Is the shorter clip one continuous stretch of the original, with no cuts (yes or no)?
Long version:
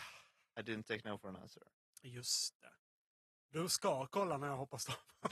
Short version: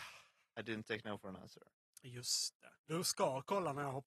no